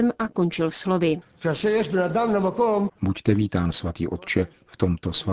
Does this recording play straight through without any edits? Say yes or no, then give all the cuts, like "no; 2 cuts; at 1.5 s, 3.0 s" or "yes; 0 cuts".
no; 1 cut; at 2.9 s